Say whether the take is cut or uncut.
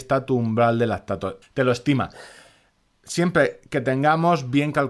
cut